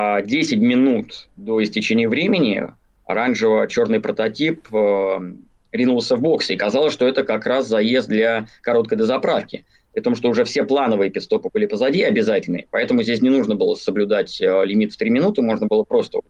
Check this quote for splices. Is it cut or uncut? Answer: uncut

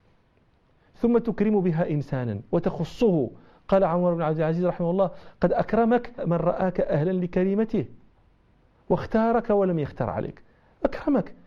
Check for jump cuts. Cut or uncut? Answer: cut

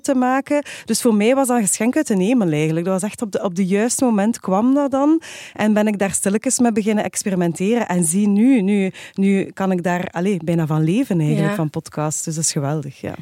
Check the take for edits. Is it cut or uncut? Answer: uncut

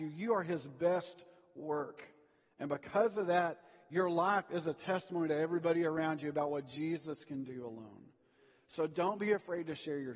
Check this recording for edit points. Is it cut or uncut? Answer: uncut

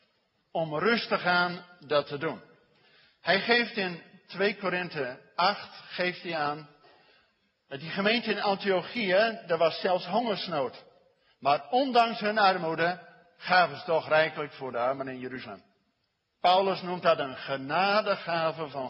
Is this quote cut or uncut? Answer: uncut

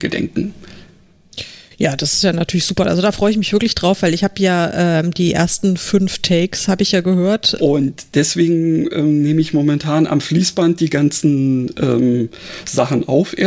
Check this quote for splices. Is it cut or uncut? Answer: cut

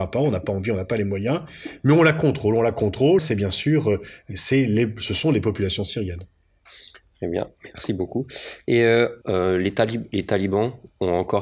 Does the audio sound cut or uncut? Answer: cut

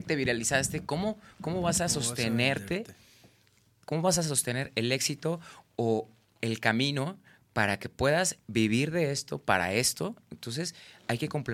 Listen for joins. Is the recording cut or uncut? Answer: cut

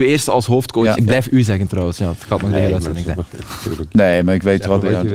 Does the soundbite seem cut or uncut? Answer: cut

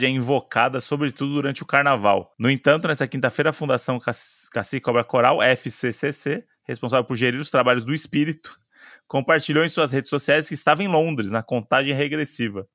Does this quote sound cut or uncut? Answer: uncut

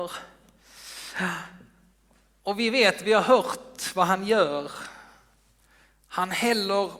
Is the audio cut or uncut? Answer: uncut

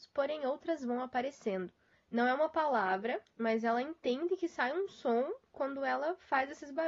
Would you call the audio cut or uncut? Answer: cut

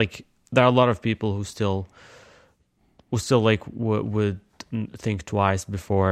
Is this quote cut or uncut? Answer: uncut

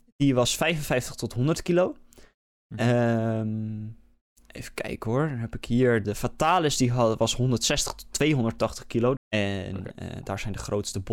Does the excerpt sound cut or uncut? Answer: cut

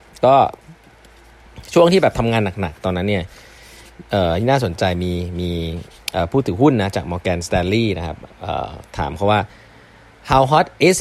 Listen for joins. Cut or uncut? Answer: uncut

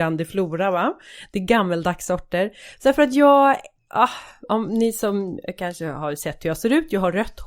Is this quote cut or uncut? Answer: uncut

